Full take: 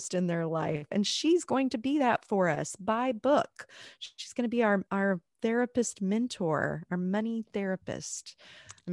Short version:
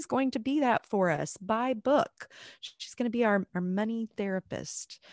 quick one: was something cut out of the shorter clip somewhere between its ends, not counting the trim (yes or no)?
yes